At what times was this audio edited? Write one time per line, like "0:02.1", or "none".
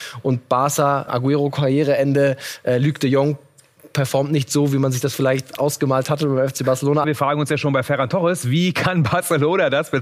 0:01.1
0:07.0